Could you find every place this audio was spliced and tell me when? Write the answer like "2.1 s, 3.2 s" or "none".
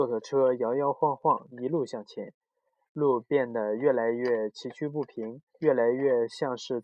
1.5 s, 5.5 s